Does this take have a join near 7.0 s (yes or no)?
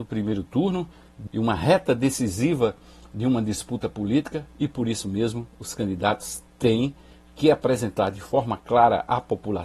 no